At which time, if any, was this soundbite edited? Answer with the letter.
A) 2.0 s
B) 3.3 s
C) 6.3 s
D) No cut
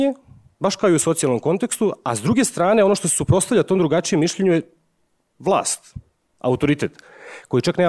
C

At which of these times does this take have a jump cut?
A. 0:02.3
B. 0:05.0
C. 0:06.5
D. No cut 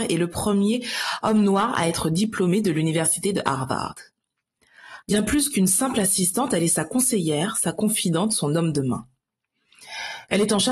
B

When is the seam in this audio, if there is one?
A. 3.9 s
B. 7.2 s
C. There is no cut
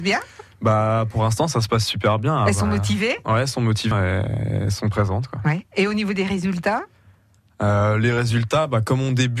A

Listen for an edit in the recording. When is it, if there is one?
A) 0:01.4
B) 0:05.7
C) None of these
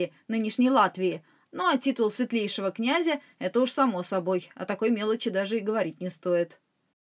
A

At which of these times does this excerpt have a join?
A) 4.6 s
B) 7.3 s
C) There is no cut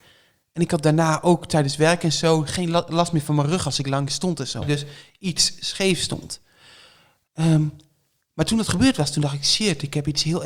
A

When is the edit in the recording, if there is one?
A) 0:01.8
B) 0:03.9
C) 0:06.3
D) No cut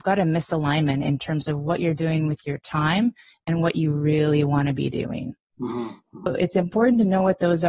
C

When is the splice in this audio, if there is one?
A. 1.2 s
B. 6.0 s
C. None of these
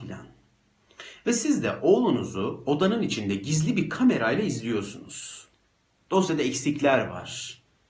B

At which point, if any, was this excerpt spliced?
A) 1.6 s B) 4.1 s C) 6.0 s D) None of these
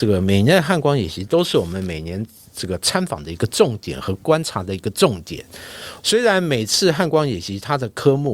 C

